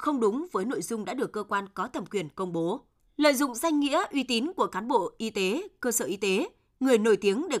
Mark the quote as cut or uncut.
uncut